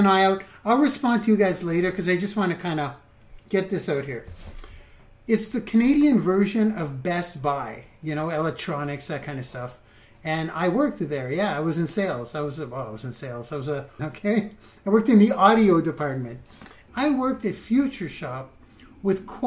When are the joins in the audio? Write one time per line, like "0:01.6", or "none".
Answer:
0:14.0
0:16.9